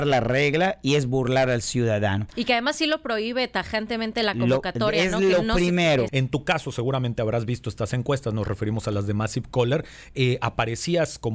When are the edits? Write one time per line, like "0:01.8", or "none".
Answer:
0:06.1

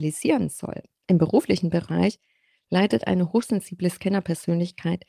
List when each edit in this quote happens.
0:01.0

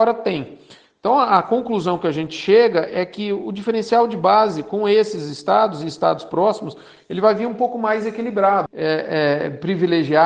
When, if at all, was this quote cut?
0:08.7

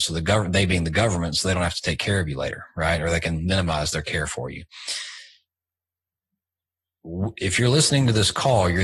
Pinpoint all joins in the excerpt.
none

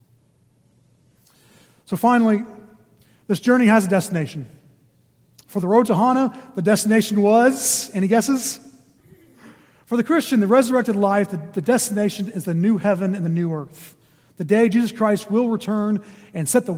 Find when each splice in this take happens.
0:09.0

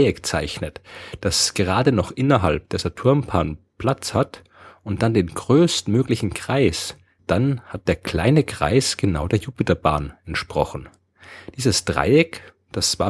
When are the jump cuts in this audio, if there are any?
0:07.2

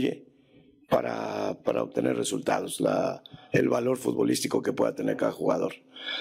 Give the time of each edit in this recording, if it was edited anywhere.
none

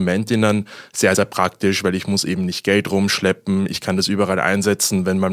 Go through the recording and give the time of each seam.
none

